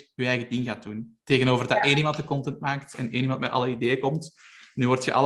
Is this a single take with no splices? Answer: yes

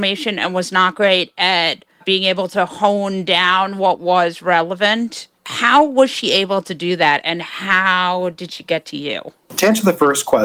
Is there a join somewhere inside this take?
no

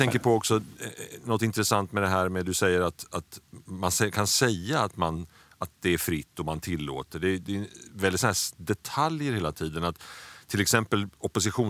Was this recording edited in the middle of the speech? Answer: no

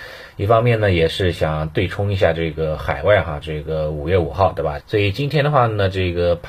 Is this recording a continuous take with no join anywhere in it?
no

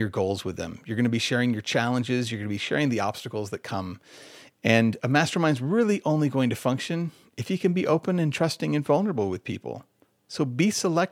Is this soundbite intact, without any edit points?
yes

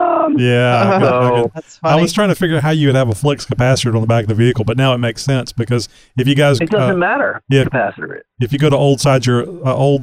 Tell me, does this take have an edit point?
yes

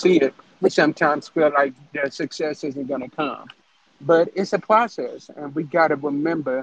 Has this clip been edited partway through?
no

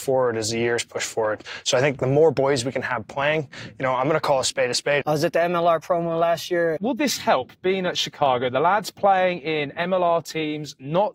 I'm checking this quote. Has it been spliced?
yes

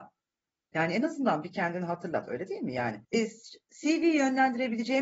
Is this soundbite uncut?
no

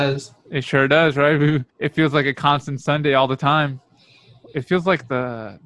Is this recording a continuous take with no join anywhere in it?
no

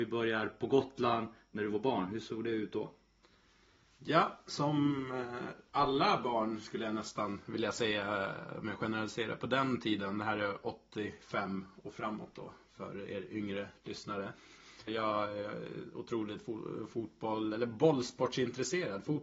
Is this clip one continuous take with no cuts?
no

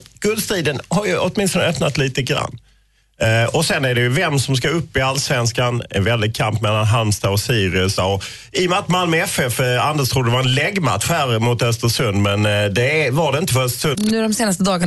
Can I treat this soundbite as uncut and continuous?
no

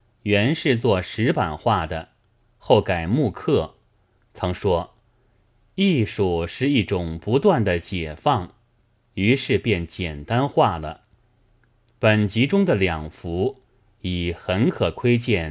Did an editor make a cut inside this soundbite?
yes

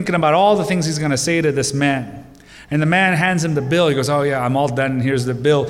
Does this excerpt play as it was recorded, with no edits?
yes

